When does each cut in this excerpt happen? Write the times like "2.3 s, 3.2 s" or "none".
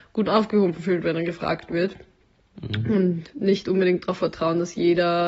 none